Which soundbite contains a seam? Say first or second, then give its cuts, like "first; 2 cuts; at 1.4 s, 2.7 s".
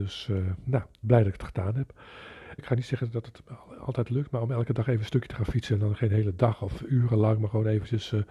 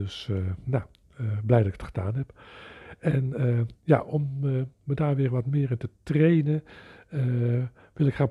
first; 2 cuts; at 1.0 s, 2.6 s